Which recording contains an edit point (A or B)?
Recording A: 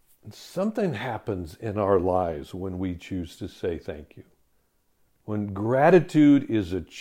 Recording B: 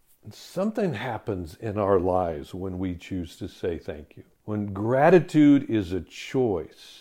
B